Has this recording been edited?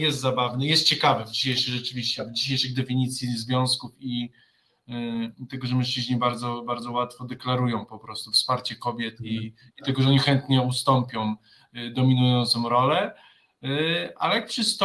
no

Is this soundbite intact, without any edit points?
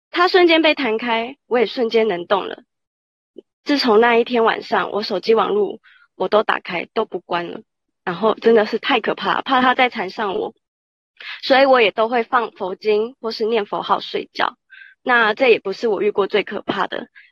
yes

